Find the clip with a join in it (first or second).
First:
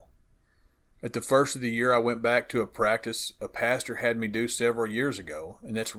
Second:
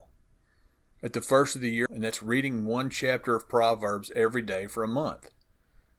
second